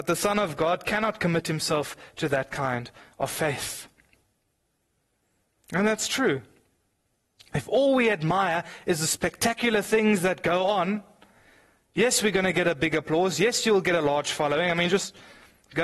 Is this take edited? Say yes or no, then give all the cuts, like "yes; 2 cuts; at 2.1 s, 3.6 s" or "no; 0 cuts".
no; 0 cuts